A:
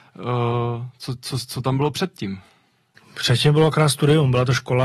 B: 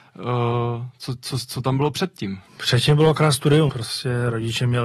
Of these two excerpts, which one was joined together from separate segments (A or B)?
B